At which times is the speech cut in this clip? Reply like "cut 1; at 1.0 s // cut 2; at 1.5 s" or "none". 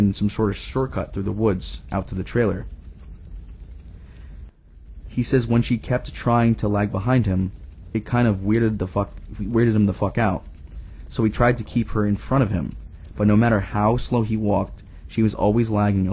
cut 1; at 5.0 s